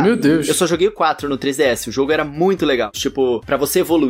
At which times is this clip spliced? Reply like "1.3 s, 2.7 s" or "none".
2.9 s